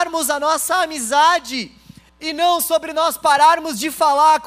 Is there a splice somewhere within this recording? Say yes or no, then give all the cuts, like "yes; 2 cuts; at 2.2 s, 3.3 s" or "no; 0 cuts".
yes; 1 cut; at 2.1 s